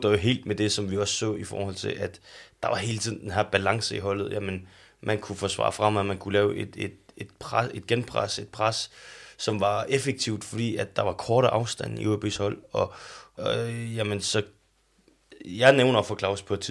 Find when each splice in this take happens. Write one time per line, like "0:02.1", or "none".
0:13.4